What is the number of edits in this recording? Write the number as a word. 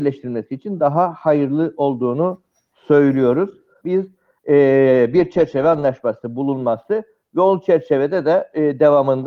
one